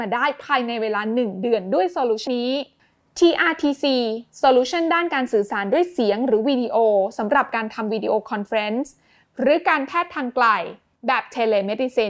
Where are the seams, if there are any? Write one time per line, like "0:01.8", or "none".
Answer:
0:02.3